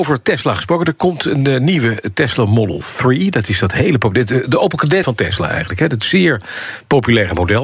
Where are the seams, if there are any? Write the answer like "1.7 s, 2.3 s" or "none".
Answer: 5.0 s